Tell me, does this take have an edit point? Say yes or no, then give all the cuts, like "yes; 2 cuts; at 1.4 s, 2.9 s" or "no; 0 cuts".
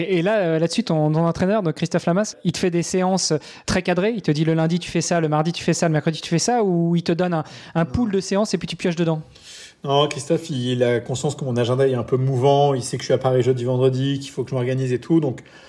no; 0 cuts